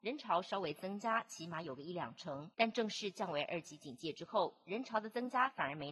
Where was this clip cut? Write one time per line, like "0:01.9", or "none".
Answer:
0:02.5